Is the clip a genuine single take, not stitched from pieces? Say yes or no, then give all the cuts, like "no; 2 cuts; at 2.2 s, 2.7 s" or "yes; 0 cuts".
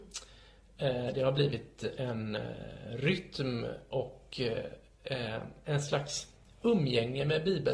yes; 0 cuts